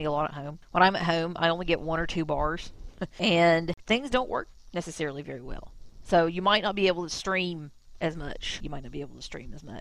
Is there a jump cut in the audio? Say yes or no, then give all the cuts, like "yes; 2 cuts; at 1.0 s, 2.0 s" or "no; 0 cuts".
yes; 1 cut; at 8.6 s